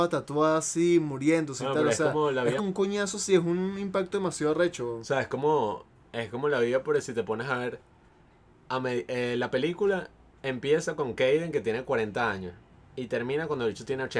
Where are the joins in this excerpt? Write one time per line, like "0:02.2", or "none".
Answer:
0:02.6